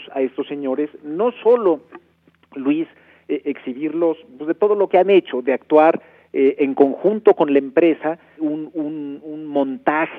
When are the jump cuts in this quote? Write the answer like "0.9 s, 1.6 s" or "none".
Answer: 8.4 s